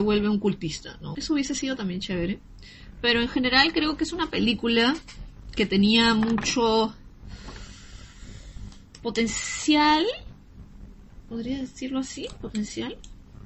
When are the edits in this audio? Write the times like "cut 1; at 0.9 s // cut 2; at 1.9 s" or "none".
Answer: cut 1; at 1.1 s